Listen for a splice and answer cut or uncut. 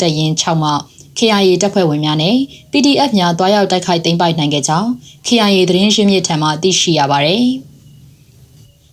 uncut